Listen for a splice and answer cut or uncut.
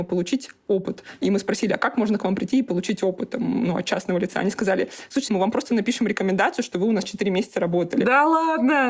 cut